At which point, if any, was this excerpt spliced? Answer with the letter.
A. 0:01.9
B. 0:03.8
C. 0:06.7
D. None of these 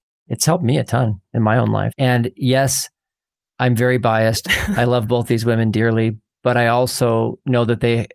A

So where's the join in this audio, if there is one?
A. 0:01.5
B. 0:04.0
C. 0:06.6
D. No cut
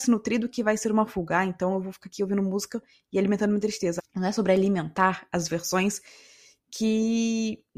B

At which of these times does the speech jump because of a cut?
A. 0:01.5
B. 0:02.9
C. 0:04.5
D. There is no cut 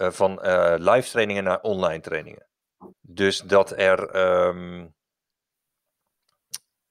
B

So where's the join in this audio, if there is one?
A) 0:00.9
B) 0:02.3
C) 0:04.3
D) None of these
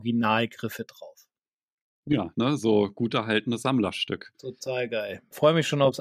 B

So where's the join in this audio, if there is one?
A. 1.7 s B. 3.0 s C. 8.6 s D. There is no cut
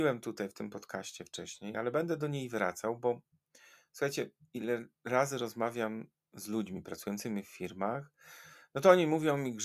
D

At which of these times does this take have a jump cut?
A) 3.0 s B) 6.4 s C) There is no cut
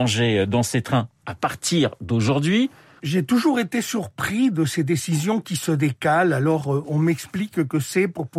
A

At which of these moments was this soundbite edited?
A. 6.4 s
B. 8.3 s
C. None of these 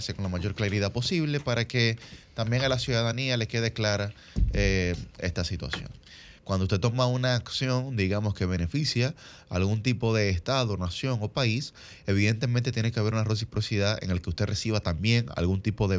A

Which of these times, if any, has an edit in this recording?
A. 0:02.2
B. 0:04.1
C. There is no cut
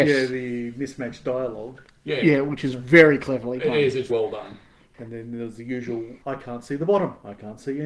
B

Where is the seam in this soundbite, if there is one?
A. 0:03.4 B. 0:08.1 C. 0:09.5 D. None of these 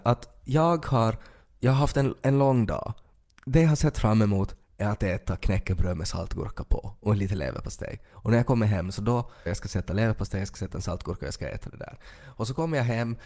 C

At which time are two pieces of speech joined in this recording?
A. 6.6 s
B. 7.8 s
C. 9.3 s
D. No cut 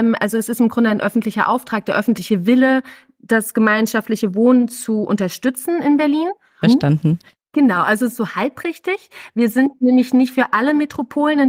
A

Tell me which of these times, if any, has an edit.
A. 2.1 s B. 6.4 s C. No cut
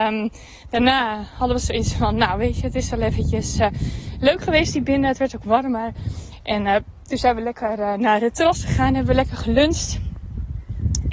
C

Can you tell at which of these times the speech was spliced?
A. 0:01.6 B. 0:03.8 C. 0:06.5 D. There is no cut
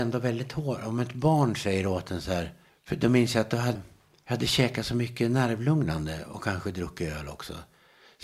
B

